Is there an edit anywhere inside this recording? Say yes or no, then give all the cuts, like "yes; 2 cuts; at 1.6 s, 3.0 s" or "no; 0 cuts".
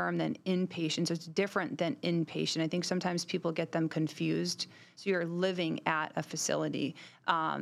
no; 0 cuts